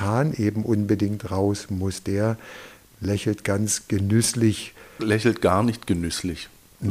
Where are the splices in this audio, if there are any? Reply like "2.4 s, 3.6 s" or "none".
5.0 s

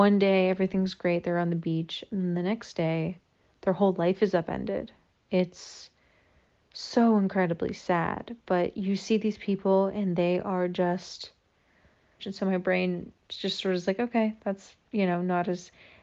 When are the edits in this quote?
12.2 s, 14.8 s

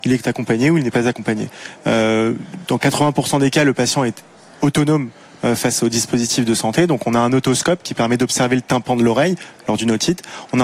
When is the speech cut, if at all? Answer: none

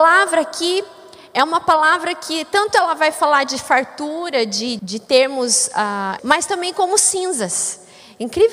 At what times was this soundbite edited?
4.8 s, 6.2 s

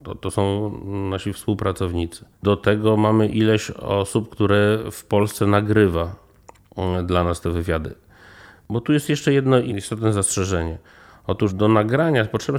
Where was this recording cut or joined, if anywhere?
2.3 s

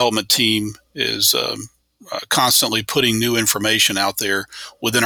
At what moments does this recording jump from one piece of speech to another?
none

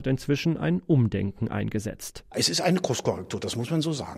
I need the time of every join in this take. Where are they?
none

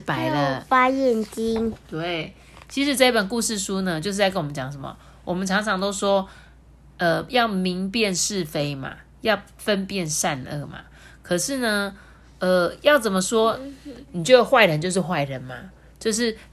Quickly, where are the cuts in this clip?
14.1 s

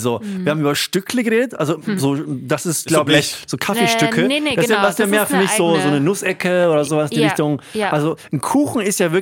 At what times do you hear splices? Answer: none

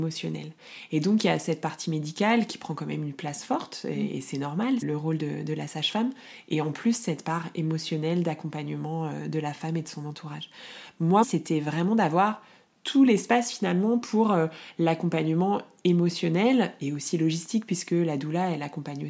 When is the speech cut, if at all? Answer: 4.8 s, 11.2 s

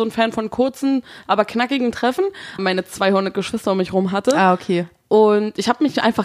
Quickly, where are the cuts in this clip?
2.6 s

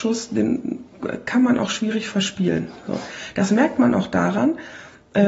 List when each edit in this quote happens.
none

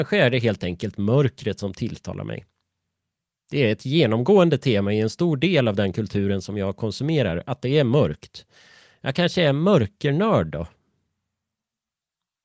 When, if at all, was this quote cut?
none

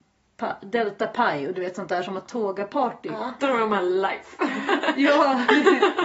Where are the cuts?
3.4 s

